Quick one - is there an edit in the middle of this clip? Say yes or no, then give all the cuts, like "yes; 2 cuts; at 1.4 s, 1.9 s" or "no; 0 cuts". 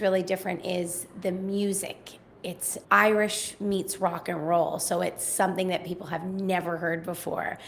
yes; 1 cut; at 2.8 s